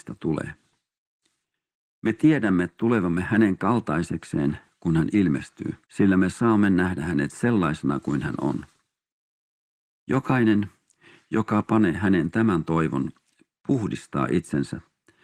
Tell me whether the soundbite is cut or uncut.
cut